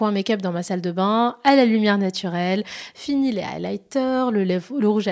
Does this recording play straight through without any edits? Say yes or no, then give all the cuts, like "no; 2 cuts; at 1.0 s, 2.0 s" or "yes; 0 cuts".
yes; 0 cuts